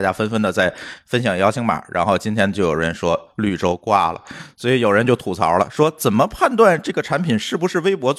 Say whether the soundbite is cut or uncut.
uncut